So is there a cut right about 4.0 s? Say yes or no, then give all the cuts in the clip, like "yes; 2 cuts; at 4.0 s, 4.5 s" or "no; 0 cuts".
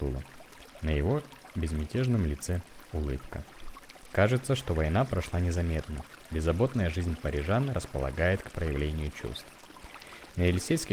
yes; 1 cut; at 4.0 s